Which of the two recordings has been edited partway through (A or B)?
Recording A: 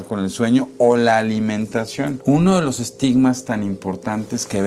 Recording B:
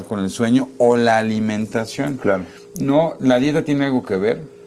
A